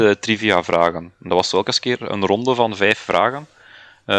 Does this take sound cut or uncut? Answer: uncut